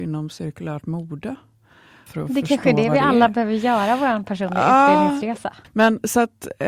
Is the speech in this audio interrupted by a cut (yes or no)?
yes